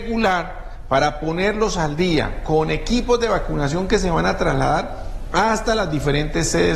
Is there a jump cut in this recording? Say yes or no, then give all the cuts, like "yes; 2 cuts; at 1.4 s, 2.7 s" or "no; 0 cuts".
no; 0 cuts